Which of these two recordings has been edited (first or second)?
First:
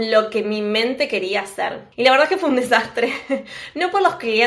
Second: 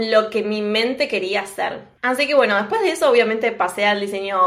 first